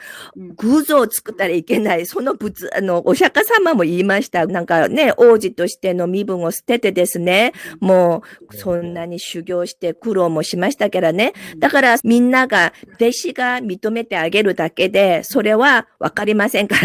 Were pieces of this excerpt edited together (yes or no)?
yes